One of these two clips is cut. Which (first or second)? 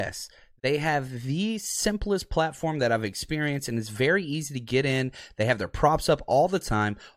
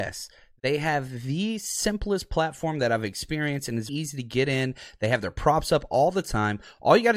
second